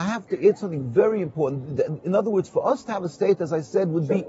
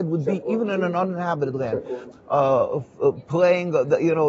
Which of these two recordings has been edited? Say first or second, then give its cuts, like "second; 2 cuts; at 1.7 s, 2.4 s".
second; 1 cut; at 2.1 s